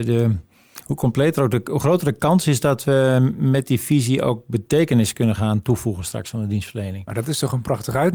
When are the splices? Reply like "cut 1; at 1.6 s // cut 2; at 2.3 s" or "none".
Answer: none